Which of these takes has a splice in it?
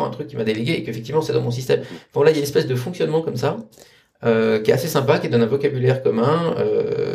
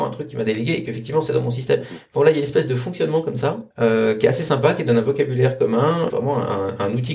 second; 2 cuts; at 3.7 s, 6.1 s

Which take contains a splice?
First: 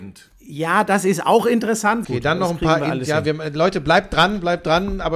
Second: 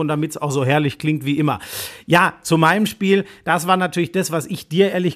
first; 1 cut; at 2.0 s

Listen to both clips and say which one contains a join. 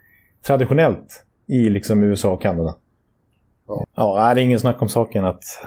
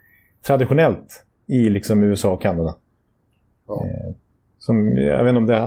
first; 1 cut; at 3.8 s

